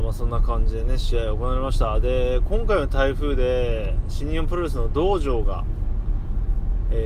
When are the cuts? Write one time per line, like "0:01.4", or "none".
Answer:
none